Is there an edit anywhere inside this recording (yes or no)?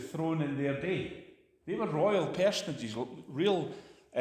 no